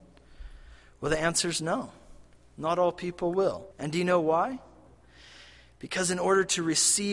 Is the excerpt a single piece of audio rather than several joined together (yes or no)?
no